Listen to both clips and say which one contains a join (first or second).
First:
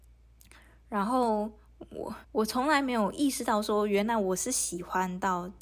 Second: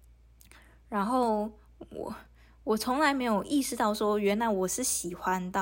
first